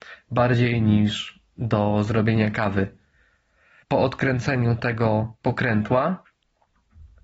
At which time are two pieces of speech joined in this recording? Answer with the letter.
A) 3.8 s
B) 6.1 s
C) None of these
A